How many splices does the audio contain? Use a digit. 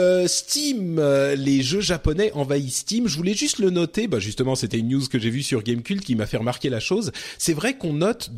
0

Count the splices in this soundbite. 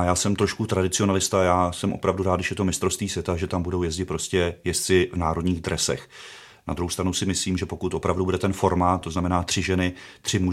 1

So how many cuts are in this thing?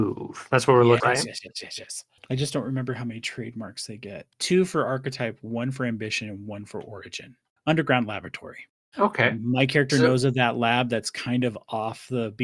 3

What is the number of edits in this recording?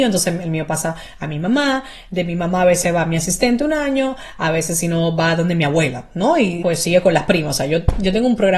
1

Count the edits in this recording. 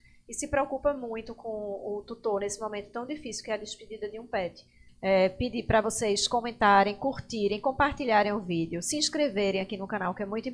1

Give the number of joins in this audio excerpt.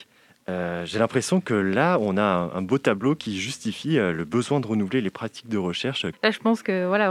1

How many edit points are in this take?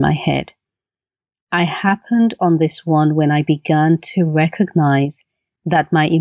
0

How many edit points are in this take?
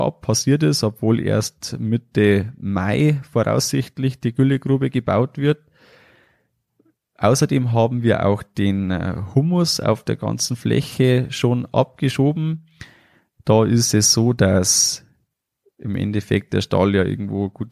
0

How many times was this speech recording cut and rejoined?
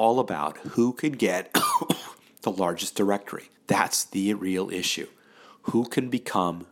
1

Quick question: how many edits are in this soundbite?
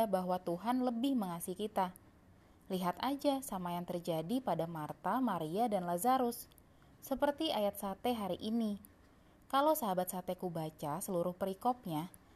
0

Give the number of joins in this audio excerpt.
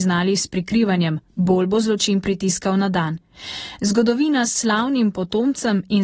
0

